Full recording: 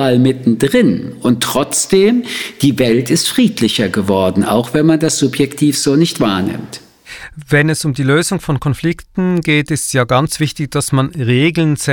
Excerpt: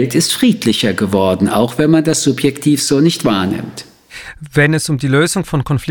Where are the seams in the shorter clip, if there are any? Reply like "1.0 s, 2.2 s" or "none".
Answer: none